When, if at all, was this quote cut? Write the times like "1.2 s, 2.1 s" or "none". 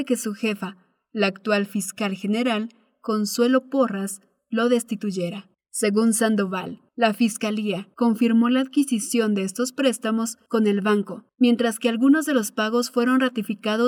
5.6 s